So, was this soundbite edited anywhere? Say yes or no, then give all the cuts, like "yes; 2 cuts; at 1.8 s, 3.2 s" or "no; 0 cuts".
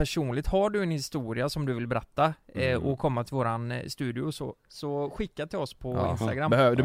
yes; 1 cut; at 4.6 s